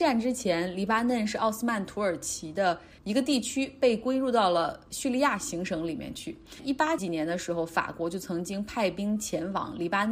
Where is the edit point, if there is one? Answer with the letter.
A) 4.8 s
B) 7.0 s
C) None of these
B